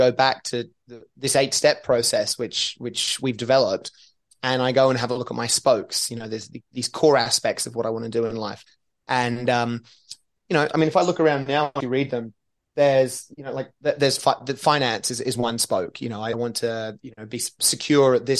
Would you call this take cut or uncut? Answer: cut